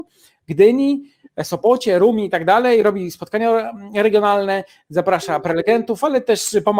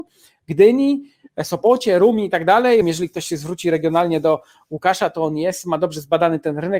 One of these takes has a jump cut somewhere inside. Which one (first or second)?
second